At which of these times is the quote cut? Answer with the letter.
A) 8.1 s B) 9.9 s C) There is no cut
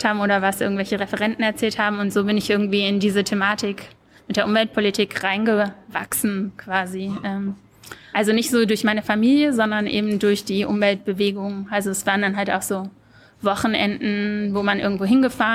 A